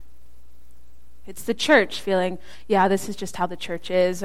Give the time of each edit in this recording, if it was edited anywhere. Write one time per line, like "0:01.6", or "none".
0:01.2